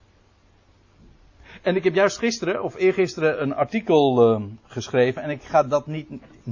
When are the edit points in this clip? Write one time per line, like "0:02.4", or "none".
none